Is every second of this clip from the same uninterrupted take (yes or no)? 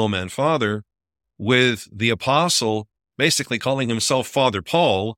yes